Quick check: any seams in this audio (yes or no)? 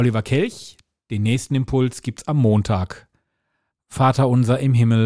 yes